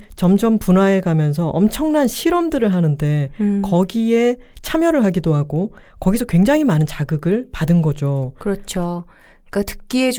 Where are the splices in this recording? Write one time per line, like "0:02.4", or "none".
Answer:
none